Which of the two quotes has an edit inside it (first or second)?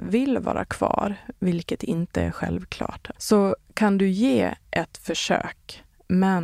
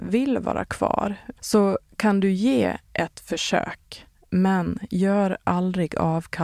second